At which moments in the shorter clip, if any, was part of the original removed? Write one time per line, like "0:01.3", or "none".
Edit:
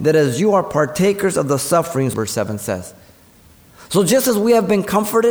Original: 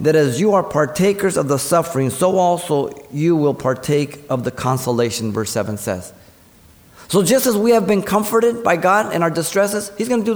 0:02.1